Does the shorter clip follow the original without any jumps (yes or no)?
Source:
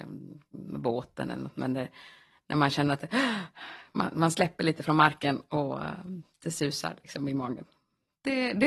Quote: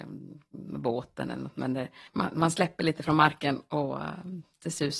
no